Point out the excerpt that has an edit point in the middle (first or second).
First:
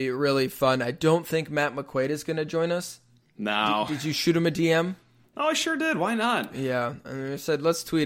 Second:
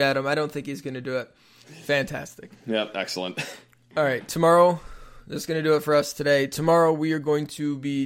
second